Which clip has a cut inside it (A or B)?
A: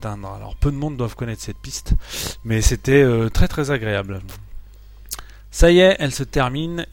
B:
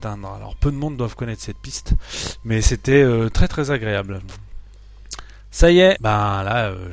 B